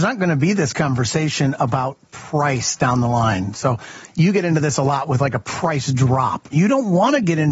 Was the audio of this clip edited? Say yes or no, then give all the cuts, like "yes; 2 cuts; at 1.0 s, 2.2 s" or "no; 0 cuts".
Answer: yes; 1 cut; at 6.5 s